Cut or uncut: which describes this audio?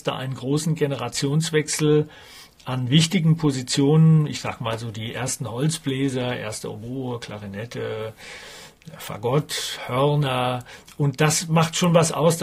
uncut